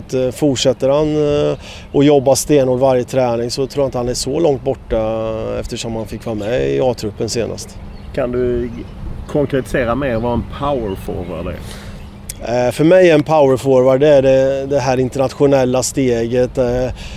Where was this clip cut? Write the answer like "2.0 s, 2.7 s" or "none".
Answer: none